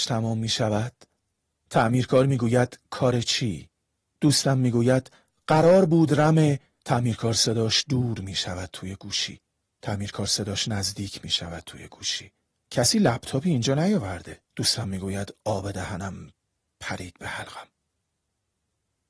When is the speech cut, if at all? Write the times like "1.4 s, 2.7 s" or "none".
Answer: 9.8 s, 14.4 s